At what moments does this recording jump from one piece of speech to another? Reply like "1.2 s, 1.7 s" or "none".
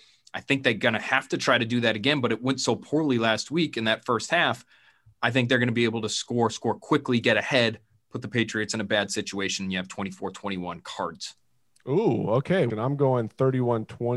12.7 s